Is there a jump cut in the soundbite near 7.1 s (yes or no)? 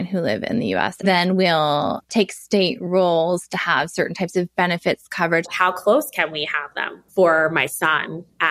yes